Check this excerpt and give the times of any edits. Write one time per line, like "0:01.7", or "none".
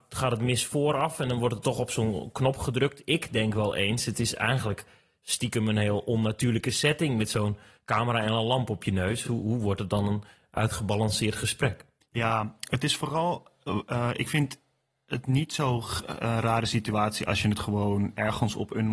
none